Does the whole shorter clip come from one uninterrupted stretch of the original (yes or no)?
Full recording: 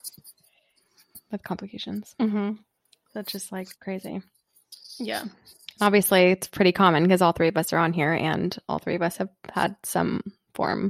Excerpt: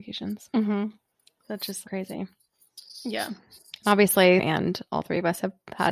no